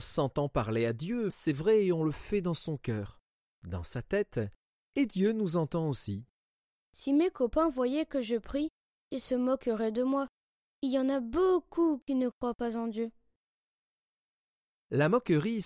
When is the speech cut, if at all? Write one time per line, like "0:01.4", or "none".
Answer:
0:01.3